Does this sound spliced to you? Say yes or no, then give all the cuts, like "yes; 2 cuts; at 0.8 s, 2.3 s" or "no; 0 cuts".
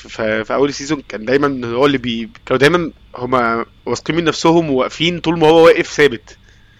yes; 2 cuts; at 1.0 s, 2.4 s